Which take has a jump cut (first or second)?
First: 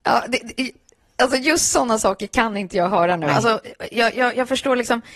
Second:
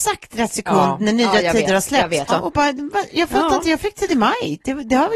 second